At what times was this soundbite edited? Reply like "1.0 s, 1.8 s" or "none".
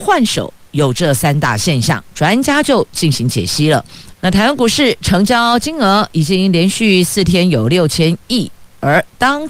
4.1 s